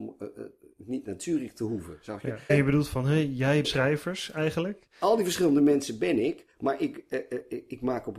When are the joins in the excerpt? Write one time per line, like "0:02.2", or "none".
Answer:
0:02.5
0:03.6